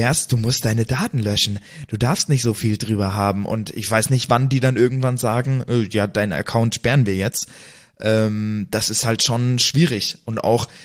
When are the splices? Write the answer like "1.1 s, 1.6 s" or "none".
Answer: none